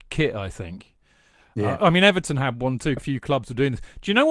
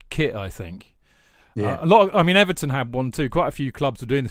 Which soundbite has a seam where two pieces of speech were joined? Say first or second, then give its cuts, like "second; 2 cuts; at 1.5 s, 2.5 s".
first; 2 cuts; at 1.8 s, 3.0 s